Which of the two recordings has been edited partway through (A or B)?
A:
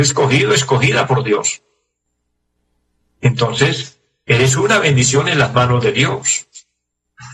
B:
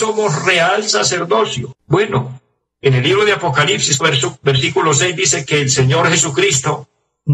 B